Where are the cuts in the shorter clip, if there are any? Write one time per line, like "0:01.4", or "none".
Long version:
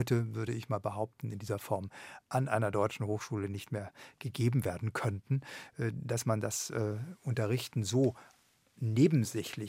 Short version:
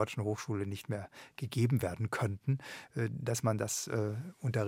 none